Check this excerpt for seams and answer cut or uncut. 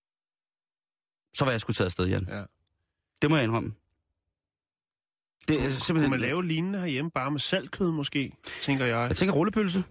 uncut